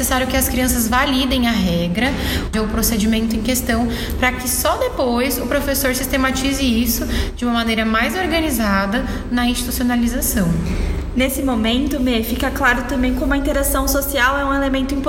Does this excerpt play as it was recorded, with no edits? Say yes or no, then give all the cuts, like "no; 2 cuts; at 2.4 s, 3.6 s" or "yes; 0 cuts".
no; 1 cut; at 2.5 s